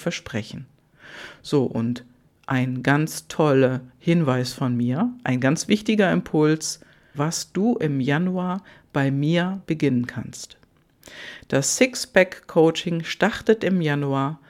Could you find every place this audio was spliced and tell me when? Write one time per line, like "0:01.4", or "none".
0:07.1